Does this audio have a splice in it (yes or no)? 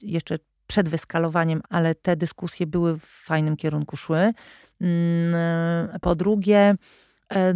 yes